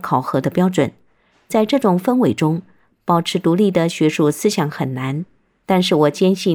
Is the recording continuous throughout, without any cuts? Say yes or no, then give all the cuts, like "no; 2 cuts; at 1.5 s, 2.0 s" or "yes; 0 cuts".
yes; 0 cuts